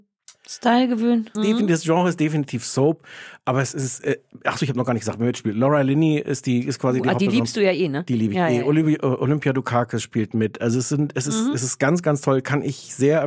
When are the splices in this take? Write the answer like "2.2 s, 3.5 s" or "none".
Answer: 1.4 s